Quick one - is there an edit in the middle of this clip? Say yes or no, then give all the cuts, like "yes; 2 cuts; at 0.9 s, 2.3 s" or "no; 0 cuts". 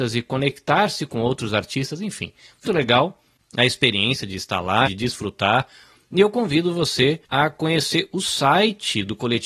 yes; 3 cuts; at 2.7 s, 4.9 s, 7.2 s